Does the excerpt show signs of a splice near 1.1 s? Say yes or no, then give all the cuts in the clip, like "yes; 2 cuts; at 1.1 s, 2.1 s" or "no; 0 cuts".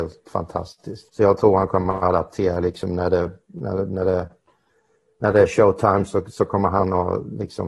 yes; 1 cut; at 1.1 s